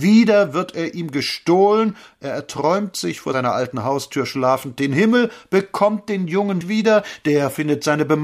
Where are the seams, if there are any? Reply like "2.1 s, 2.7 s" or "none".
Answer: 6.6 s